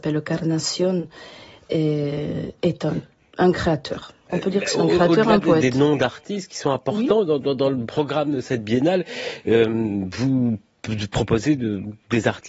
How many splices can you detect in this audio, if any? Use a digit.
0